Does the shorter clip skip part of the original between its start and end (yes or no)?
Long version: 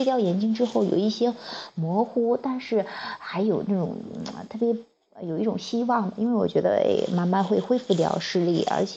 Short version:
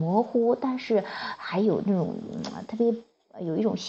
no